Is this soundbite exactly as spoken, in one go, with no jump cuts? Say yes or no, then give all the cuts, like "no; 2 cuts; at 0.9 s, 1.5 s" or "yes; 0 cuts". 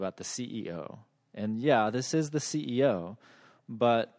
yes; 0 cuts